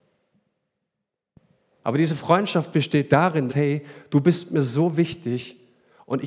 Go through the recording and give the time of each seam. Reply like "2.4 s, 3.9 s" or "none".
1.8 s, 3.5 s